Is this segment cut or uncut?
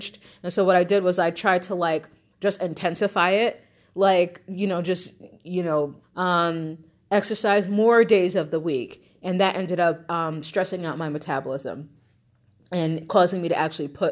cut